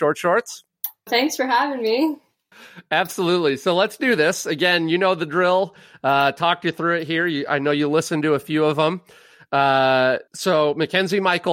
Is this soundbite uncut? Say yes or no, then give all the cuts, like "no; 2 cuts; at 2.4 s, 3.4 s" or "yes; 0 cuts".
no; 2 cuts; at 1.1 s, 10.3 s